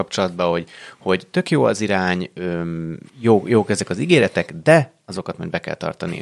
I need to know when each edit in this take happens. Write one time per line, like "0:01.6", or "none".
0:03.1